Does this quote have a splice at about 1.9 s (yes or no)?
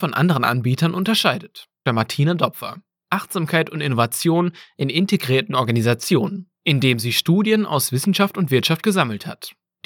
yes